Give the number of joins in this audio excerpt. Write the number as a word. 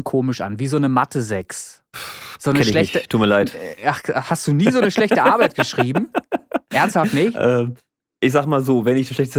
one